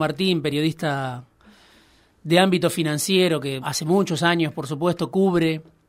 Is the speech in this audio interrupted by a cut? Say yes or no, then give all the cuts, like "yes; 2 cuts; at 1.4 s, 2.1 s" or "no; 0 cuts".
yes; 1 cut; at 3.6 s